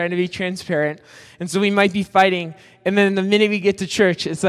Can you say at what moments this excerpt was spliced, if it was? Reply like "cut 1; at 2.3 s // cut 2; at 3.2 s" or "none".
none